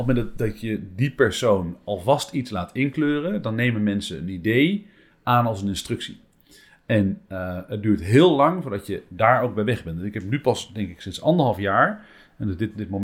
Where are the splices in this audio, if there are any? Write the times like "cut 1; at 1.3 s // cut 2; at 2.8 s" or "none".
none